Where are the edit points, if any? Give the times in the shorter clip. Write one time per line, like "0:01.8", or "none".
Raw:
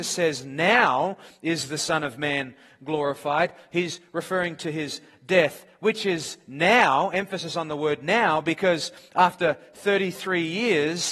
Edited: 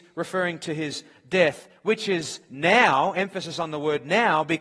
none

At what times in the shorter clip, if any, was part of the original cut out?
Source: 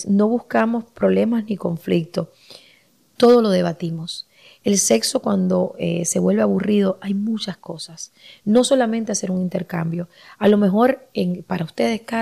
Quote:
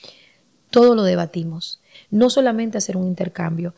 0:01.9

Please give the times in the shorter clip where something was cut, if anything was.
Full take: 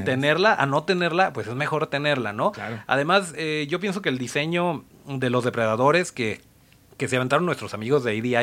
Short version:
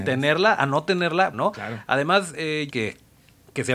0:01.3
0:02.7

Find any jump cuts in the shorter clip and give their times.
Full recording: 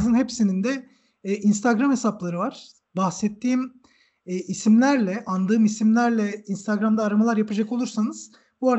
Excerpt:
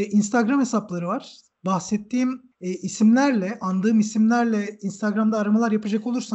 0:02.5

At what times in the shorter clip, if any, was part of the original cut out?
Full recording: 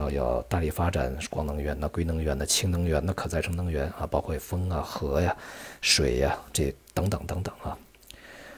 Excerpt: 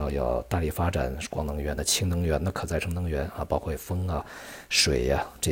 0:01.8
0:04.2

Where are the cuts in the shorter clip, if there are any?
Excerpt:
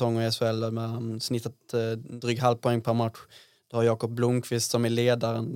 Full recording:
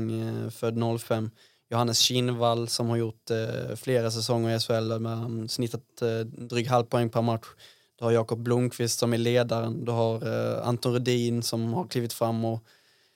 none

